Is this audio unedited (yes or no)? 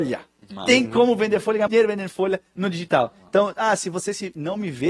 no